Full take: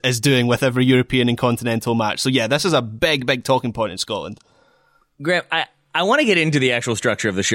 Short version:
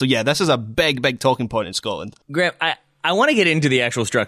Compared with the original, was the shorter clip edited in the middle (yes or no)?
yes